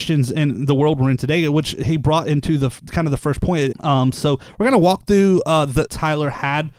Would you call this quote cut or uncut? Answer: cut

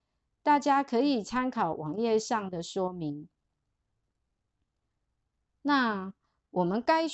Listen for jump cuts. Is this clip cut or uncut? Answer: uncut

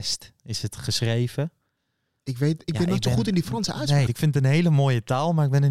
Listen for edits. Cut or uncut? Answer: cut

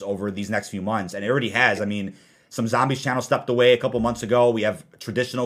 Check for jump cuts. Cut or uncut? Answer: uncut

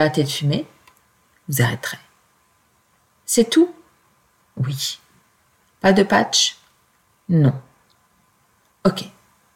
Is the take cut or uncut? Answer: uncut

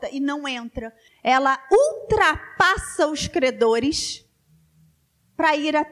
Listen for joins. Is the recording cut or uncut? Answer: cut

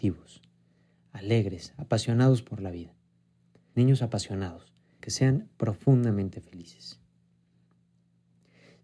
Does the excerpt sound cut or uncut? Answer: cut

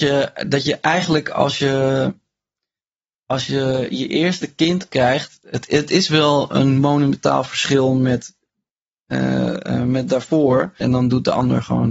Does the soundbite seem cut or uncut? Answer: cut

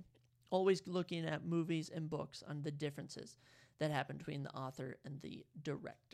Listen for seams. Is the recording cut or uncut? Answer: uncut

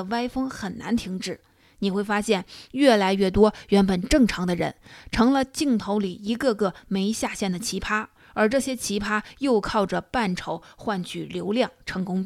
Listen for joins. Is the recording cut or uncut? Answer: uncut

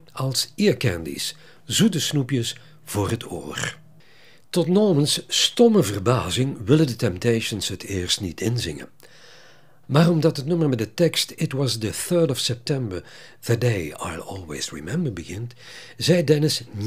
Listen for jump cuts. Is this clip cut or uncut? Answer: cut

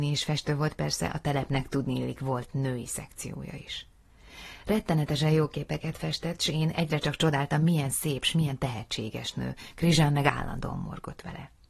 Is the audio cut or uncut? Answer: uncut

